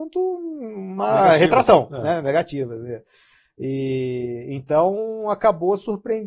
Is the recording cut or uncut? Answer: uncut